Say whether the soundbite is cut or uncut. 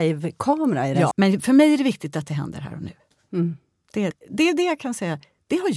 cut